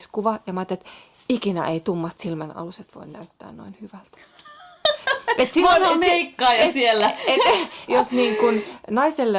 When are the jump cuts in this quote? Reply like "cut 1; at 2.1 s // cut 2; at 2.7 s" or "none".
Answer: cut 1; at 7.9 s